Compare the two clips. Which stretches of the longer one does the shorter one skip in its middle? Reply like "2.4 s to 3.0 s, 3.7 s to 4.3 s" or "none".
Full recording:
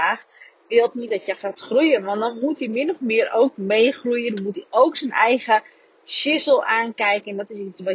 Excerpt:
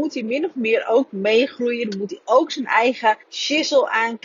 5.7 s to 6.0 s